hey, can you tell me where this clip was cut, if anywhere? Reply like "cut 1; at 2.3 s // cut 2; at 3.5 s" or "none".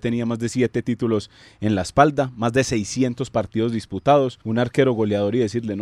cut 1; at 4.4 s